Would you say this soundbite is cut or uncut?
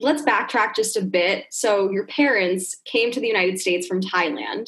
uncut